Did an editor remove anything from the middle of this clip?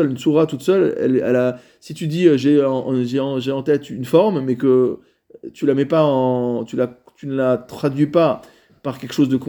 no; 0 cuts

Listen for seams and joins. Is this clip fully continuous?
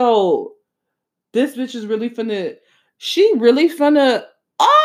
no; 1 cut; at 1.2 s

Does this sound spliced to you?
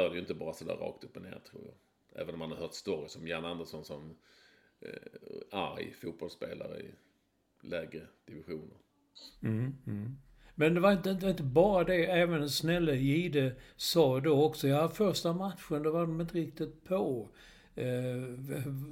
no; 0 cuts

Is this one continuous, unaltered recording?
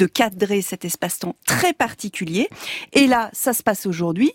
yes; 0 cuts

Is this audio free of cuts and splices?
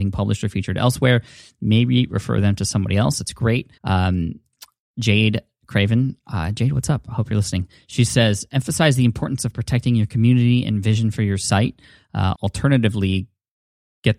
no; 2 cuts; at 3.8 s, 12.3 s

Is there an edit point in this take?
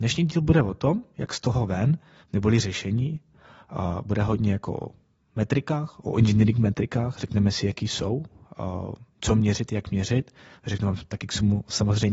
no; 0 cuts

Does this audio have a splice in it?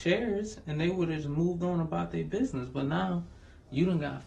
yes; 1 cut; at 1.2 s

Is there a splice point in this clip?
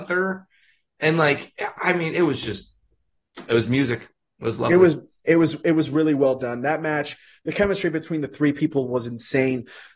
no; 0 cuts

